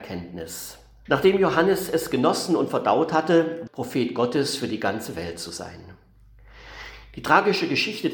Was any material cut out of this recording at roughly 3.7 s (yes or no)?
yes